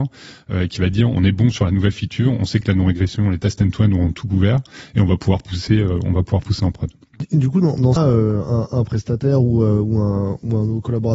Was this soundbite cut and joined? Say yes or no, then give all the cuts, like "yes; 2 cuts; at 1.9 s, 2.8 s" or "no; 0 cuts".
yes; 1 cut; at 8.0 s